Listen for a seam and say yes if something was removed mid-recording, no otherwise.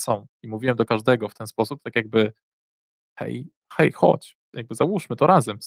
no